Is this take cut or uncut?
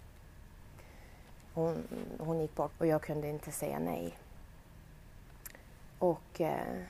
cut